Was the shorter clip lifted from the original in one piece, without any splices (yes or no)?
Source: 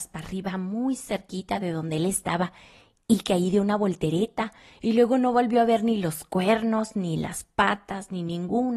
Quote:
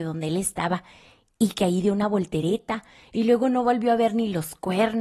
yes